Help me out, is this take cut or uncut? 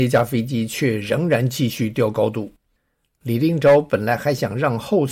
uncut